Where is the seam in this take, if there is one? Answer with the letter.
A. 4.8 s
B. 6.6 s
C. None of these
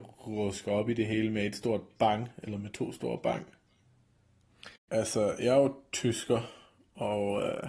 A